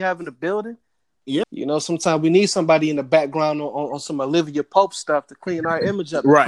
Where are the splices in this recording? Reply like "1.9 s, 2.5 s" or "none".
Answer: 1.4 s